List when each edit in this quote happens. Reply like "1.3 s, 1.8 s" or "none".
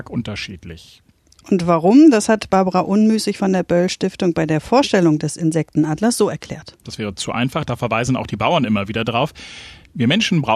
6.8 s